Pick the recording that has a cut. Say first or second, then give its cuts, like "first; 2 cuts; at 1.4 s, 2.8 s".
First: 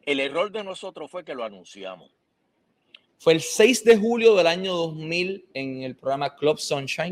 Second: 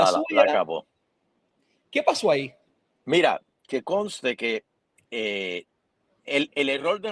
first; 1 cut; at 3.1 s